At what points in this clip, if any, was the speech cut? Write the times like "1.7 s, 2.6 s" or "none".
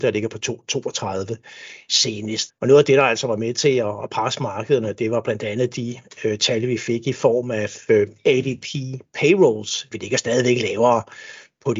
2.5 s, 9.9 s